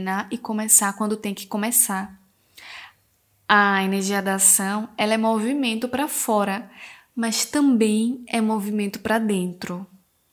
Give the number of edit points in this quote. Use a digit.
0